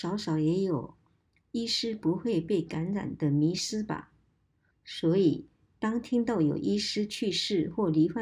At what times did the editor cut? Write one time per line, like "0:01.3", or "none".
0:04.7